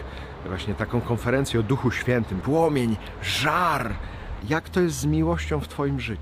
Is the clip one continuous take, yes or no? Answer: no